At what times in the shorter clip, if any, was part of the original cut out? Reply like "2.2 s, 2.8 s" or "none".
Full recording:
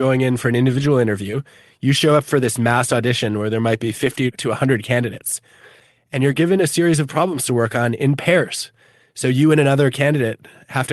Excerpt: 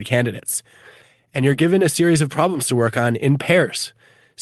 none